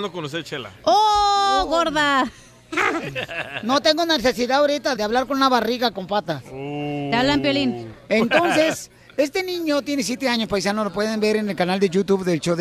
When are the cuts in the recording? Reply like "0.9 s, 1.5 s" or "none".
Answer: 5.0 s